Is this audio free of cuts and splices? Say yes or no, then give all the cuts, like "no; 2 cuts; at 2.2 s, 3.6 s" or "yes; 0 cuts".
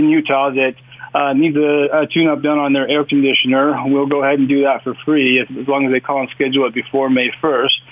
yes; 0 cuts